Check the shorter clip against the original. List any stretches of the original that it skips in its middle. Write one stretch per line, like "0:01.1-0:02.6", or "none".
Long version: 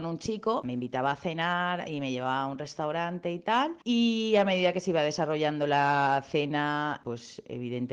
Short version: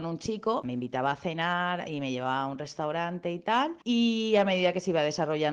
none